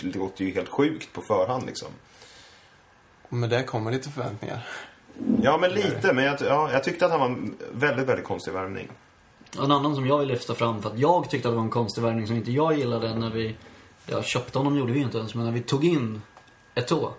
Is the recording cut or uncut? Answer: uncut